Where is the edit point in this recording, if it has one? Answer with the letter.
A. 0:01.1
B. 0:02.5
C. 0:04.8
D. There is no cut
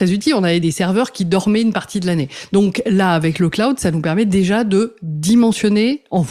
D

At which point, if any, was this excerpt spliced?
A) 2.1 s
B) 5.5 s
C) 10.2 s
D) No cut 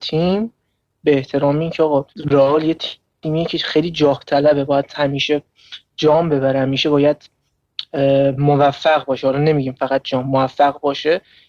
A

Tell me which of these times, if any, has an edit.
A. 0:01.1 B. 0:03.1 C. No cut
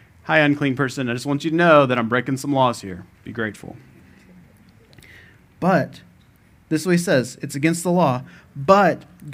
B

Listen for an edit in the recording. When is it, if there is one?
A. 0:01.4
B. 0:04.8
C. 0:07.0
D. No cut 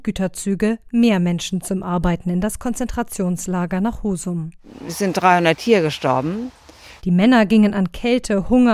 C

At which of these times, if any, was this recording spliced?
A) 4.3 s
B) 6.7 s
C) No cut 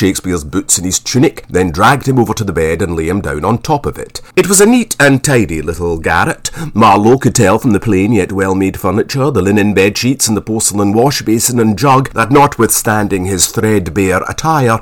A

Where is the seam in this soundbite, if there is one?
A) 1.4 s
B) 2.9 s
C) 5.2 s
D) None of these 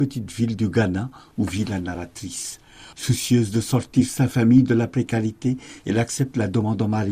B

